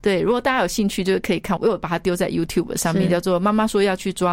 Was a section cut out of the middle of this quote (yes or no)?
yes